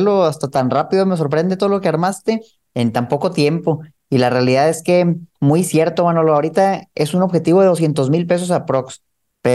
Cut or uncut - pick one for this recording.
uncut